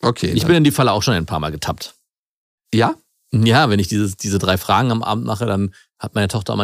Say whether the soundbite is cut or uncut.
uncut